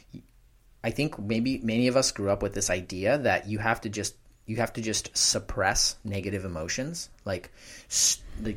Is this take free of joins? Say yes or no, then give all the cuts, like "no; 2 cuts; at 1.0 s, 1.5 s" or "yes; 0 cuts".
yes; 0 cuts